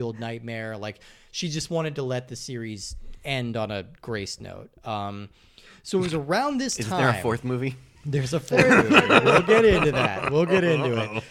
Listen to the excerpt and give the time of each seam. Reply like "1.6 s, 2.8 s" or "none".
none

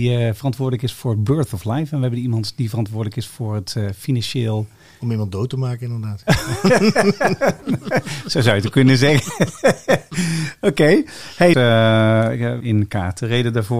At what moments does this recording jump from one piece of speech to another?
11.5 s, 12.6 s

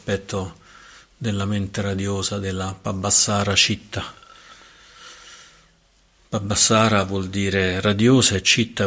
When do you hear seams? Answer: none

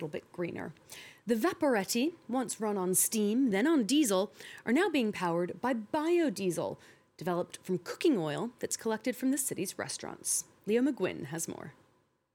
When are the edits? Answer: none

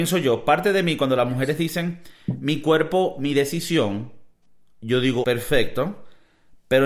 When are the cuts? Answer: 5.2 s

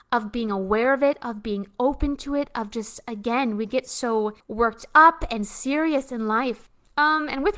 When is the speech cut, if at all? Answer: none

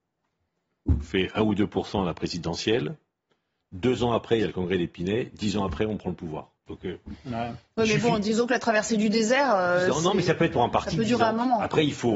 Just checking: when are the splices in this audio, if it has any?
6.6 s

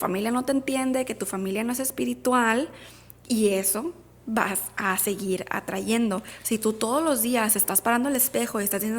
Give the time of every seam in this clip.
6.4 s

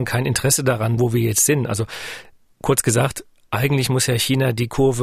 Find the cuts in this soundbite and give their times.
1.0 s

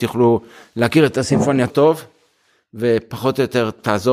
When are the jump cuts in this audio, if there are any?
1.7 s

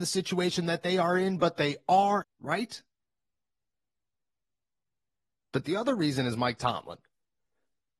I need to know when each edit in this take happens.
2.2 s

